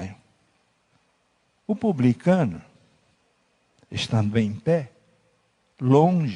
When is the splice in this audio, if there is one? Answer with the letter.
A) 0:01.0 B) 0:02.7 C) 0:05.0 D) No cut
D